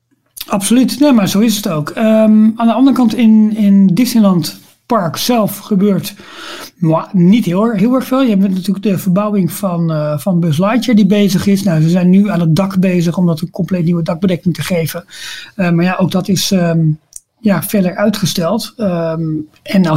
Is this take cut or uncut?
uncut